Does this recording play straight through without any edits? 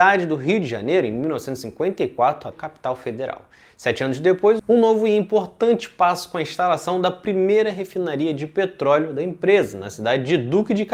no; 1 cut; at 2.5 s

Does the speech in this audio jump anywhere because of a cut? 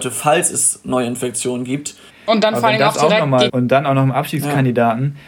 yes; 2 cuts; at 2.1 s, 3.5 s

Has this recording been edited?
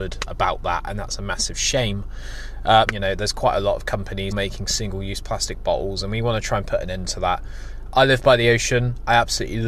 yes; 2 cuts; at 2.9 s, 4.3 s

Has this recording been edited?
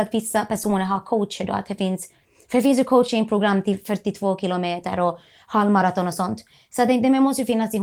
no; 0 cuts

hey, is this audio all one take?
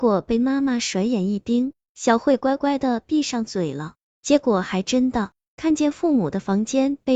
no; 2 cuts; at 4.1 s, 5.5 s

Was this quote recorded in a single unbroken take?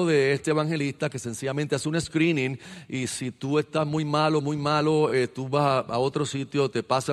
yes; 0 cuts

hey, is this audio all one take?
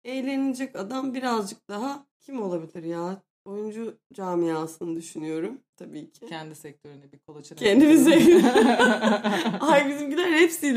no; 1 cut; at 2.1 s

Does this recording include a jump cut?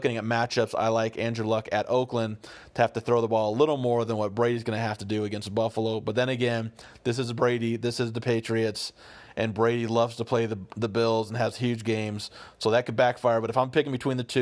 no; 0 cuts

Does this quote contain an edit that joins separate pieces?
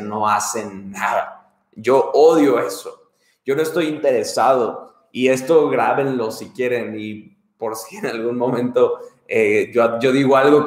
no; 0 cuts

